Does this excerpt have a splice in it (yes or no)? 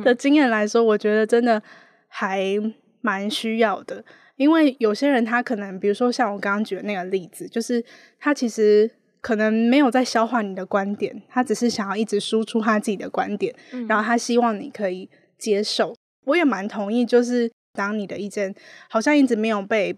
no